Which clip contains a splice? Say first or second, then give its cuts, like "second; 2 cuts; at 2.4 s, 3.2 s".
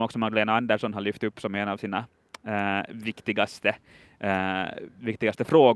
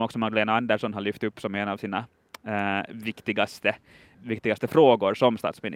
second; 1 cut; at 4.1 s